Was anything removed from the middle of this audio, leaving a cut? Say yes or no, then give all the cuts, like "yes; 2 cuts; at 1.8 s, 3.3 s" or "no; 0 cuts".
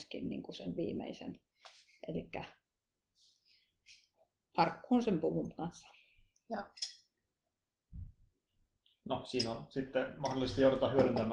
no; 0 cuts